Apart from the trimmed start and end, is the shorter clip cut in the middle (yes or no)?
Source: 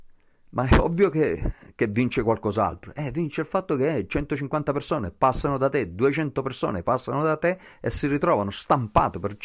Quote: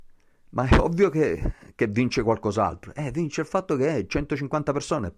no